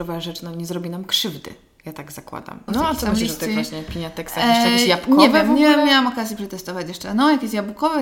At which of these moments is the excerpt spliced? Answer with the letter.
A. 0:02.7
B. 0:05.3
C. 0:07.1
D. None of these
A